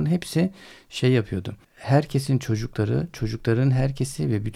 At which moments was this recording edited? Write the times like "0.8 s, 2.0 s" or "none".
1.6 s